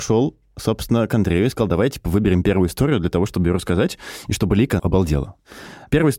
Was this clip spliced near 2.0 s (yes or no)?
no